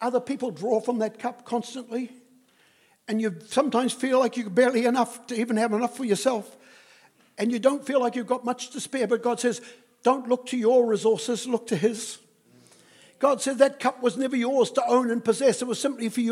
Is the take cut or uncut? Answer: uncut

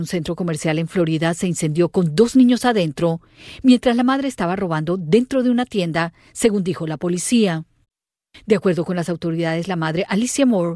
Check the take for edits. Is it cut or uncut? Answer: uncut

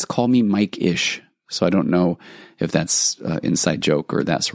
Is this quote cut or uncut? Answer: uncut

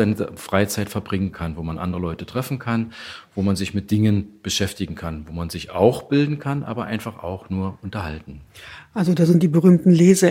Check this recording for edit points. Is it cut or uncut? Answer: uncut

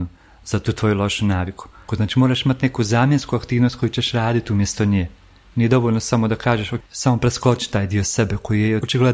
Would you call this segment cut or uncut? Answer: cut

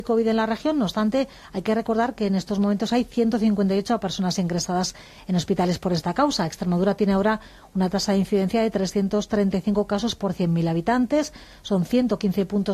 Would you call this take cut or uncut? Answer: uncut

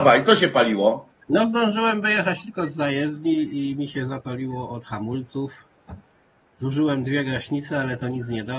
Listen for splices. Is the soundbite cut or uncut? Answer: uncut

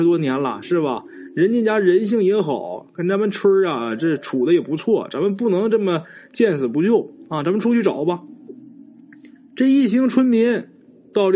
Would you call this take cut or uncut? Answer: uncut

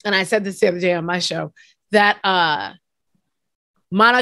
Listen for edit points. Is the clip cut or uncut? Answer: uncut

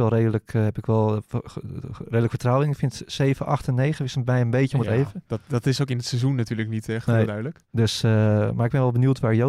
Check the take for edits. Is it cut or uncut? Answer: uncut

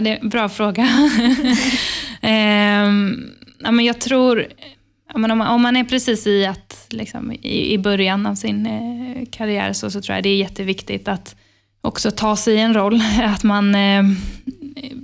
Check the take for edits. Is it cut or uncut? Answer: uncut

